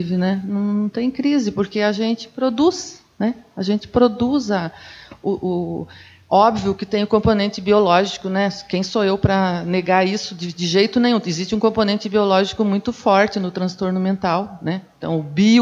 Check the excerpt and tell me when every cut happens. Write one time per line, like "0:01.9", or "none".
none